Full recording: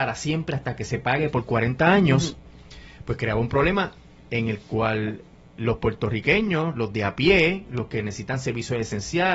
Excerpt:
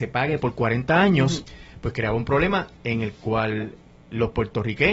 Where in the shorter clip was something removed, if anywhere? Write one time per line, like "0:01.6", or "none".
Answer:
0:01.4
0:02.8

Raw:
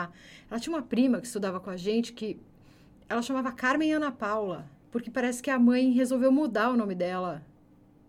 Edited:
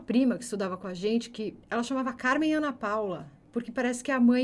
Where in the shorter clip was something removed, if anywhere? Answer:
0:01.6

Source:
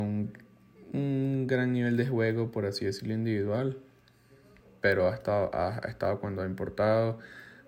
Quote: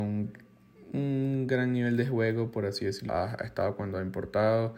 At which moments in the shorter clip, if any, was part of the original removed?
0:03.1

